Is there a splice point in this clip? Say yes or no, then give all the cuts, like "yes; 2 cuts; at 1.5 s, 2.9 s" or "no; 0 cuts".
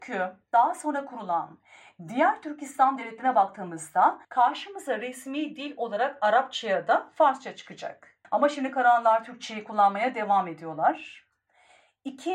yes; 2 cuts; at 4.2 s, 8.2 s